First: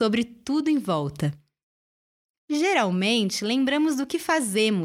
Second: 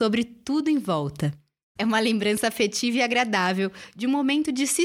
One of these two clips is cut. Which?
second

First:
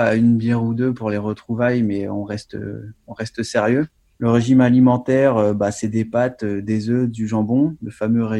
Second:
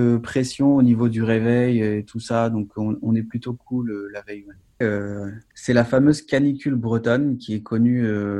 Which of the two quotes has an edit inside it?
second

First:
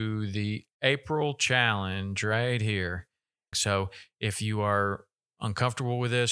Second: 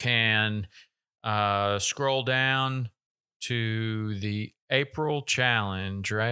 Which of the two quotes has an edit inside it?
first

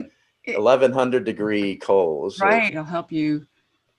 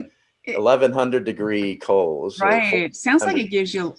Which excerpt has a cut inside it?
first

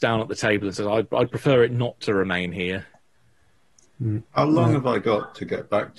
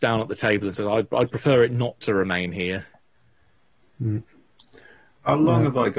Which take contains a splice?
first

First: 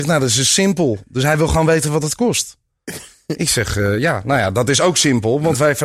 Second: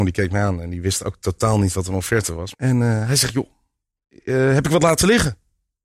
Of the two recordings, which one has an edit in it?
second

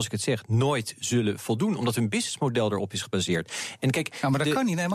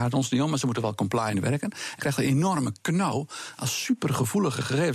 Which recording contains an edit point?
second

